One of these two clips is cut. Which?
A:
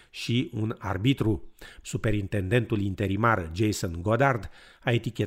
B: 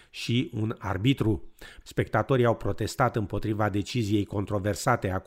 B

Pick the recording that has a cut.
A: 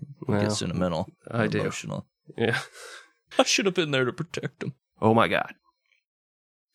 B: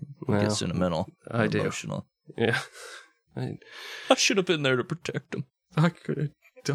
A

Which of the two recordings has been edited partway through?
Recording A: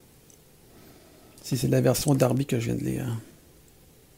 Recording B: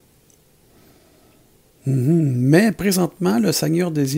A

